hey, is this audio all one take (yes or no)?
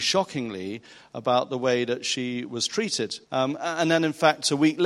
no